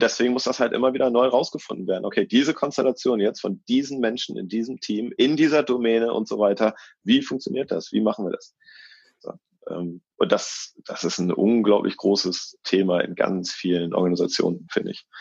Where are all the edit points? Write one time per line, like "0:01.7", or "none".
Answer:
none